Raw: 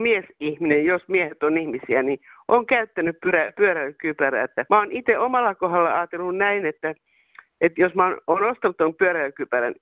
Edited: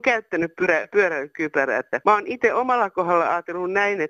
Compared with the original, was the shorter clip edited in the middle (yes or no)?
no